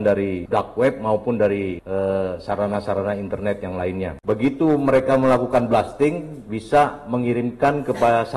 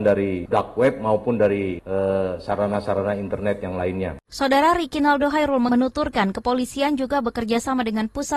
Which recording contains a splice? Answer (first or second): first